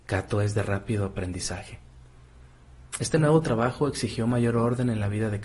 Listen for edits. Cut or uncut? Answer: uncut